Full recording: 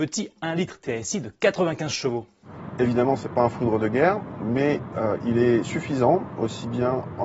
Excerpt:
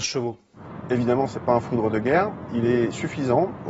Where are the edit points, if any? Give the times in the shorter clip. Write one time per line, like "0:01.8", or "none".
0:02.5